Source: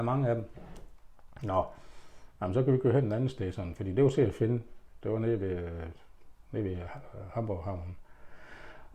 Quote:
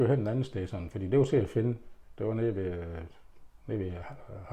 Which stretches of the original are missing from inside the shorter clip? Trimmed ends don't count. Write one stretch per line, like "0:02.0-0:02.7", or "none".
none